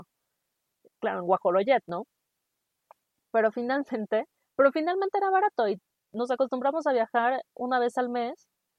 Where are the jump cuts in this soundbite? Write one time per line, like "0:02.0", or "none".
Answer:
none